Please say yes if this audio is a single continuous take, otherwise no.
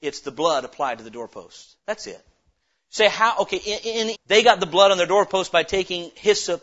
no